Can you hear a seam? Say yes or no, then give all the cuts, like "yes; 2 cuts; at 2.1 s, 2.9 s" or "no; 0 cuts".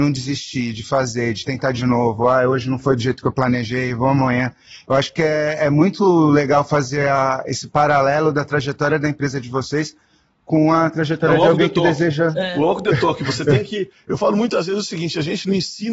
no; 0 cuts